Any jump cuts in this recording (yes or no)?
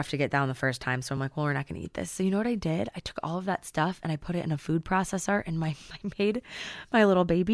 no